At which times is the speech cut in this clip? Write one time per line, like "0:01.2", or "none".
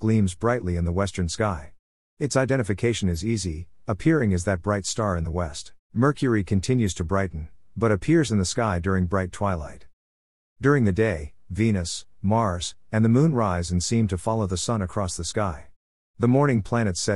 0:05.8